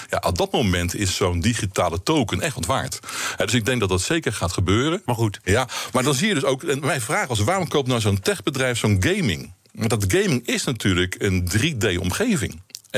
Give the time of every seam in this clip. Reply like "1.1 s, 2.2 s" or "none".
5.1 s